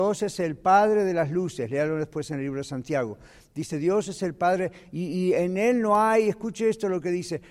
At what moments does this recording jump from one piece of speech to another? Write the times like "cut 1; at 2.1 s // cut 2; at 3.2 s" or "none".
none